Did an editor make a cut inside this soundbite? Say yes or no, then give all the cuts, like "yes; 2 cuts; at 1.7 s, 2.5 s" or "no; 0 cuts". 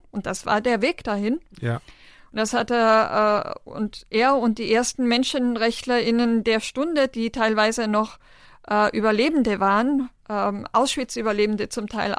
no; 0 cuts